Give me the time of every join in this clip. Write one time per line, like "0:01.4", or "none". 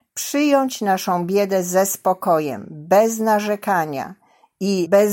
none

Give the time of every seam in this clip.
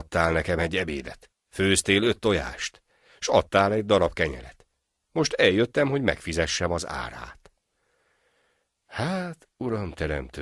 none

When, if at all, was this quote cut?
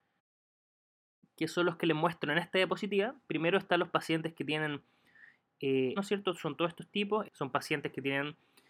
0:06.0
0:07.2

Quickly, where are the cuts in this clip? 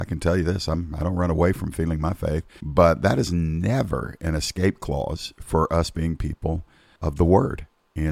0:02.6
0:07.0

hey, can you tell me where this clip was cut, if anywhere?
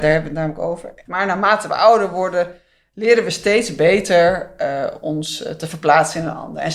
0:01.1

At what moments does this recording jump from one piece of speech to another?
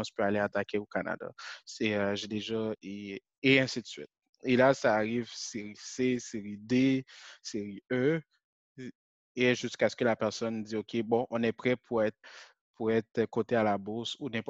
none

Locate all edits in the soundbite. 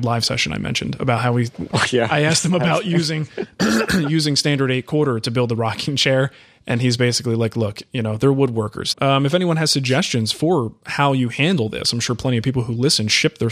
0:08.9

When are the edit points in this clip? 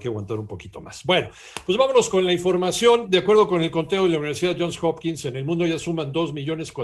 none

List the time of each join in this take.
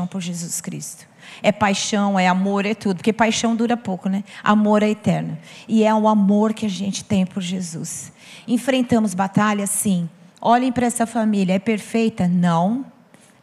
none

